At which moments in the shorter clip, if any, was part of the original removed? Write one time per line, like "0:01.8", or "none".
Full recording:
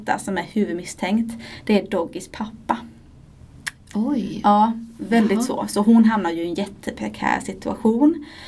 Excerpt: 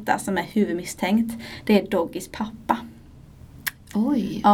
none